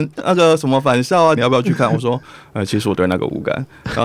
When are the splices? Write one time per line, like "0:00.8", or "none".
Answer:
0:01.4